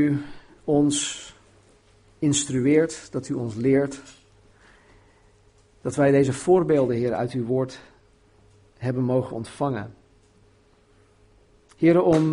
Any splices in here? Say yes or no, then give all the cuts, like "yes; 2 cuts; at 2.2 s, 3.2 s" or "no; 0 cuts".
no; 0 cuts